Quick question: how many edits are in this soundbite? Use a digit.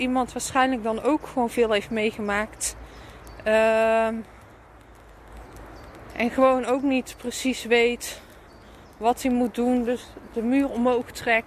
0